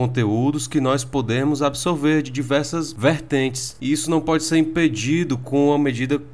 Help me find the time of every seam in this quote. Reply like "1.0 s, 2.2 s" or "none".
none